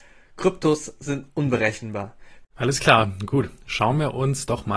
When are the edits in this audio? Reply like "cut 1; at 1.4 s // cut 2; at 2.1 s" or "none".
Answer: cut 1; at 2.4 s